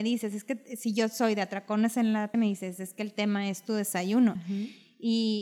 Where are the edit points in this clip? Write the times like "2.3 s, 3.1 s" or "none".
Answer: 2.3 s, 4.4 s